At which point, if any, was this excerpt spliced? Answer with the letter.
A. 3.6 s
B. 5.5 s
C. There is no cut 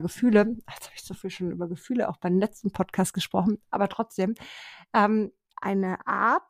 B